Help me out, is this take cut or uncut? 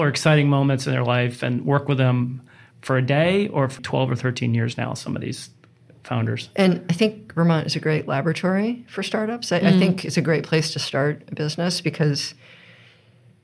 cut